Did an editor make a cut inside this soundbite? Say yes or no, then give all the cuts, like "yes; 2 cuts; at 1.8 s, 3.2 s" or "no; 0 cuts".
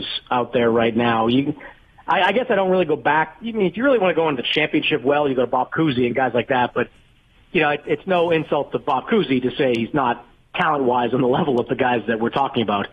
no; 0 cuts